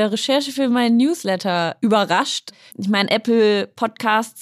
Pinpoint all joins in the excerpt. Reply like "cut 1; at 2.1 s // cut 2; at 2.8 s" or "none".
cut 1; at 2.7 s

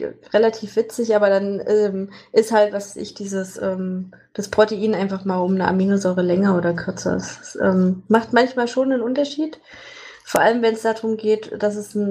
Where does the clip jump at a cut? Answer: none

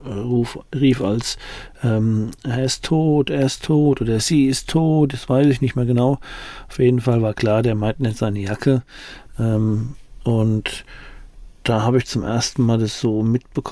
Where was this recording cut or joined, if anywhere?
none

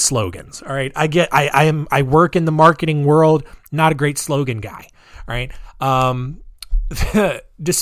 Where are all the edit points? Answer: none

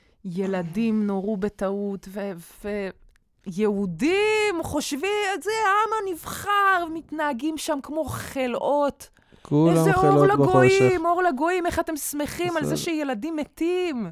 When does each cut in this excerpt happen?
none

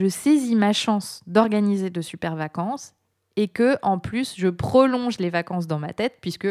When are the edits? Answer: none

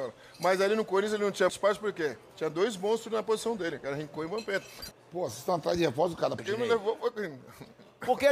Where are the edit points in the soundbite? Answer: cut 1; at 1.5 s // cut 2; at 4.9 s // cut 3; at 6.4 s

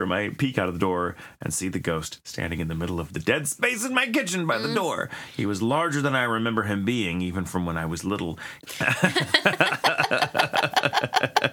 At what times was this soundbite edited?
cut 1; at 8.6 s

